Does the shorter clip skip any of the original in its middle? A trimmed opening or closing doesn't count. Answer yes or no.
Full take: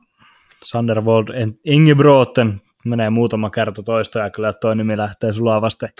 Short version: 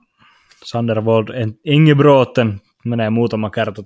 no